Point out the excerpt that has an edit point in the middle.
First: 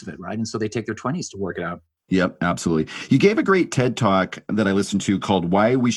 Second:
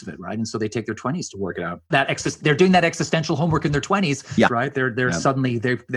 second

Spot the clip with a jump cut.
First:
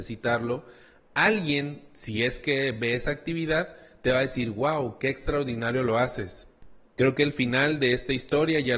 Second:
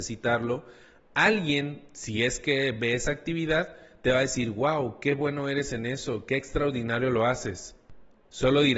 first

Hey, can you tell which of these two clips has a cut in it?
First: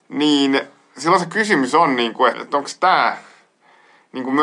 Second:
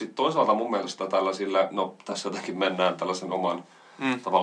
first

